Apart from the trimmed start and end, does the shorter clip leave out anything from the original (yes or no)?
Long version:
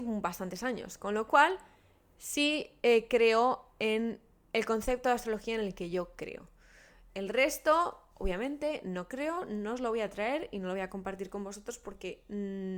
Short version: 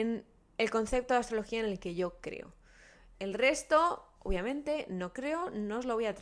no